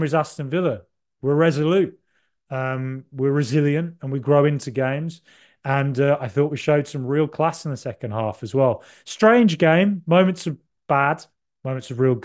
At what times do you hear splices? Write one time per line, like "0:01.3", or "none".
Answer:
none